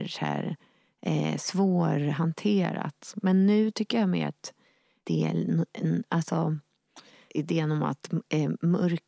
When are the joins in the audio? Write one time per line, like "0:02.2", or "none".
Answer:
0:07.3